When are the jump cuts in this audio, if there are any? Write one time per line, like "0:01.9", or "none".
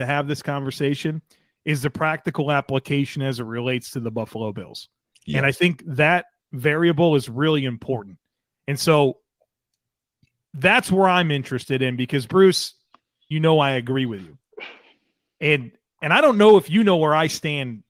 0:13.3